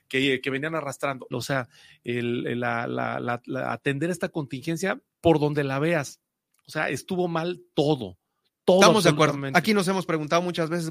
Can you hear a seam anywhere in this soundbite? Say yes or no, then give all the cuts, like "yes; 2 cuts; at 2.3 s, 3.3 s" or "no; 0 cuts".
yes; 1 cut; at 1.3 s